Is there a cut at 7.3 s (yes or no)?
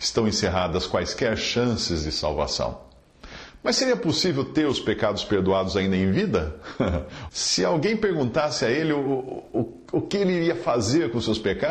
yes